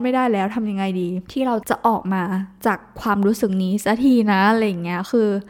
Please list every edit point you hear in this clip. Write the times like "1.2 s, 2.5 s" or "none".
1.2 s

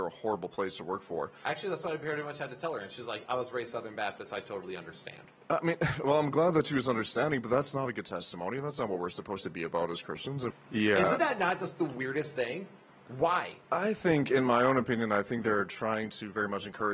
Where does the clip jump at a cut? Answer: 10.5 s, 13.6 s

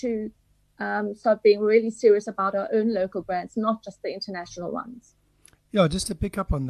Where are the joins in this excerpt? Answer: none

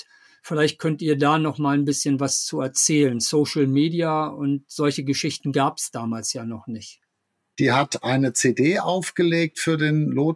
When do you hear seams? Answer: 7.5 s

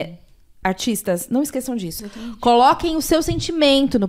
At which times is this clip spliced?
2.0 s

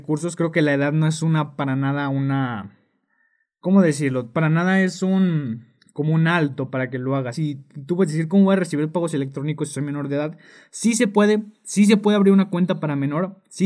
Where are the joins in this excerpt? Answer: 7.3 s

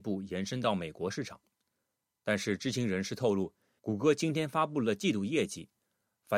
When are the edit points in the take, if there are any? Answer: 3.8 s

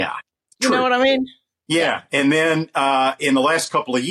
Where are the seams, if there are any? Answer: none

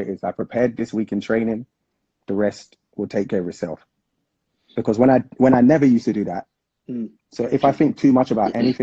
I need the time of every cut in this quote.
7.2 s

